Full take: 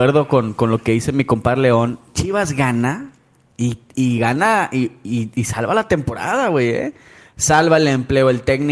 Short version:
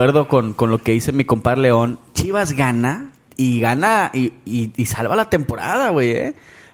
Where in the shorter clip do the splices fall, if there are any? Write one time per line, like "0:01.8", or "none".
0:03.3

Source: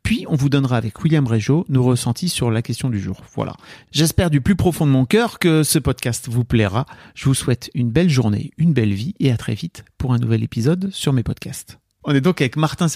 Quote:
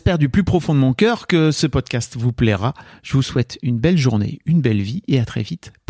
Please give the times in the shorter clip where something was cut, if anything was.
none

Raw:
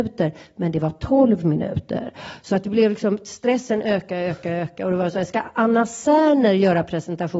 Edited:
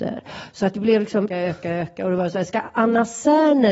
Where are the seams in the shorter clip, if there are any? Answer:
0:01.3

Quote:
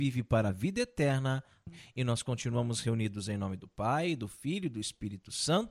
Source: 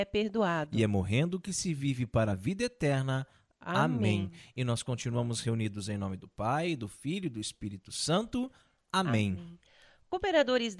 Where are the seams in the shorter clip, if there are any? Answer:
0:01.7

